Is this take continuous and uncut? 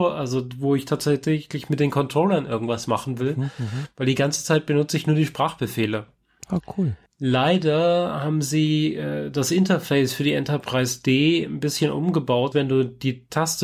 no; 2 cuts; at 7.1 s, 12.5 s

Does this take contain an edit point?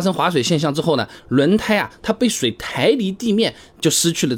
no; 0 cuts

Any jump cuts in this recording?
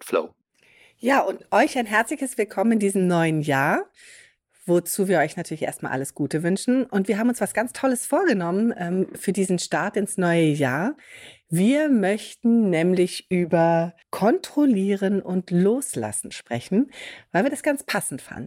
yes; 1 cut; at 14.0 s

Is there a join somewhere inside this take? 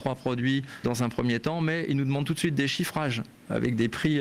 no; 0 cuts

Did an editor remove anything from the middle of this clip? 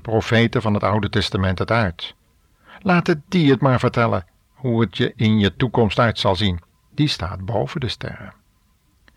yes; 1 cut; at 6.8 s

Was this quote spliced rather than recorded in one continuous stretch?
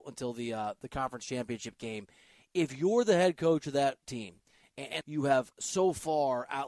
yes; 1 cut; at 5.0 s

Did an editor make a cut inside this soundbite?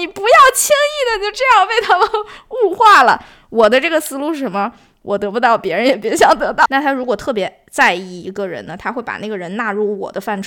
yes; 1 cut; at 6.7 s

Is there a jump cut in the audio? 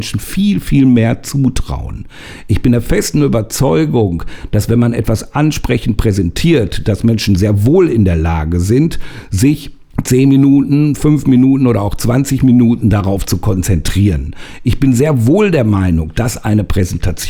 no; 0 cuts

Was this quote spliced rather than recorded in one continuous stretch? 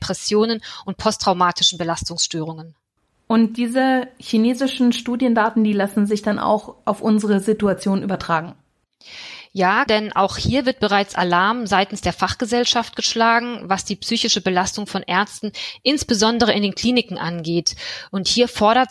yes; 1 cut; at 9.9 s

